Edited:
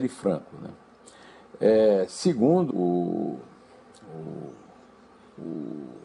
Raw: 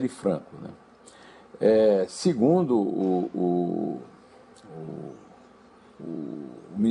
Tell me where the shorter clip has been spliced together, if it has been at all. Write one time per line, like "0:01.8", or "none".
0:02.7